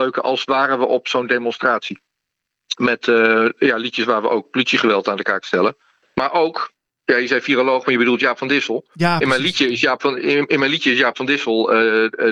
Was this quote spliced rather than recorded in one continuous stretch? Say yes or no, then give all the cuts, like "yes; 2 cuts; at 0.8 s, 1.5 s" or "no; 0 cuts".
no; 0 cuts